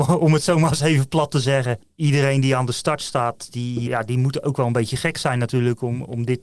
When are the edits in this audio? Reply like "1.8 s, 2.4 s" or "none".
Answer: 3.9 s